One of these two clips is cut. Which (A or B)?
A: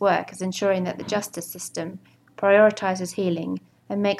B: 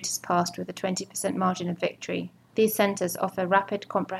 B